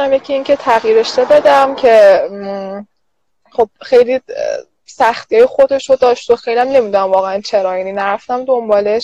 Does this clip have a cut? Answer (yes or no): no